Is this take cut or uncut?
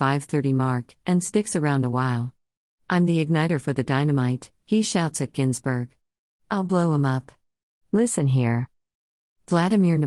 uncut